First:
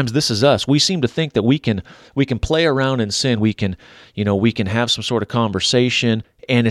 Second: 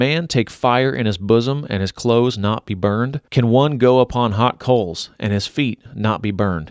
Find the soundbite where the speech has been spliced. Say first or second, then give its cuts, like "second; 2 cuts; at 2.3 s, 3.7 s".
first; 1 cut; at 3.4 s